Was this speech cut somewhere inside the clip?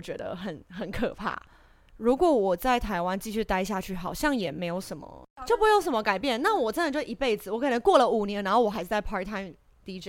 no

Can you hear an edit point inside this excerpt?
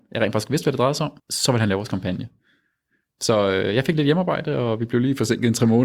yes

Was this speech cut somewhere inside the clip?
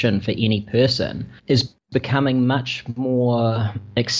yes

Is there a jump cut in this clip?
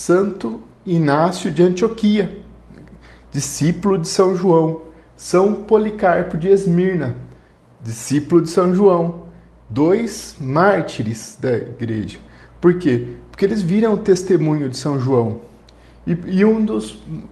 no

